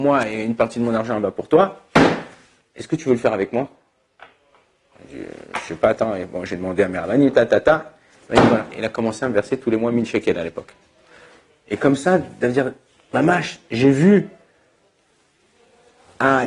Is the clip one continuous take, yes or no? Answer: yes